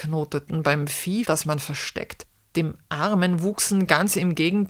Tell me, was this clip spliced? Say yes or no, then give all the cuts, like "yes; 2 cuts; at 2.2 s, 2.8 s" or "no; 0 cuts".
yes; 1 cut; at 1.2 s